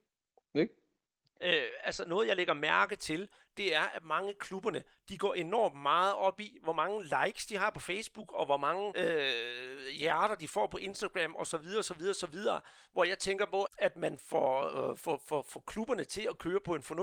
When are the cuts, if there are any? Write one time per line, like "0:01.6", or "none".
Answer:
0:01.4
0:08.9
0:13.6